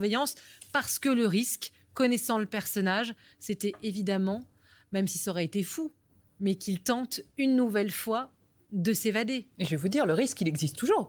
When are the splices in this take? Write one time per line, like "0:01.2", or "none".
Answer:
none